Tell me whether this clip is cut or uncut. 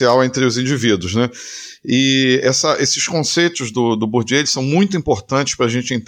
uncut